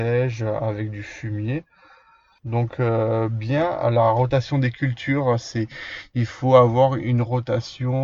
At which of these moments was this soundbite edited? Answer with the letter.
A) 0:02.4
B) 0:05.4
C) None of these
A